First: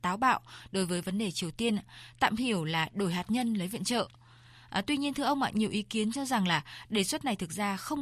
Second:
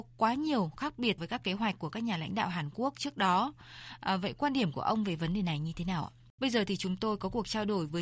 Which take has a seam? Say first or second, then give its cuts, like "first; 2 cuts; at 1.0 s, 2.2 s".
second; 2 cuts; at 1.2 s, 6.4 s